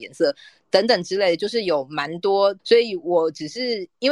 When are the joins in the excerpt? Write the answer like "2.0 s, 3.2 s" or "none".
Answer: 2.6 s